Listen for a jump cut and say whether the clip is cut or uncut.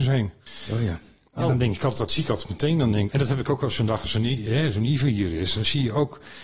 cut